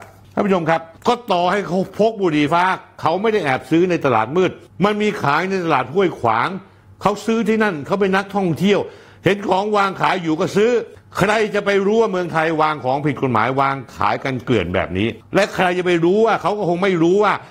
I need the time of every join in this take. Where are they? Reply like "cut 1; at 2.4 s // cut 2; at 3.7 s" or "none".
cut 1; at 2.5 s